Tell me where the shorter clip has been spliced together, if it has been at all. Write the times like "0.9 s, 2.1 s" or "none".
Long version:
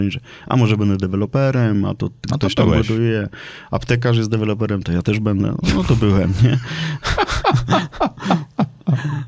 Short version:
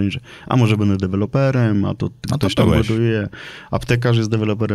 none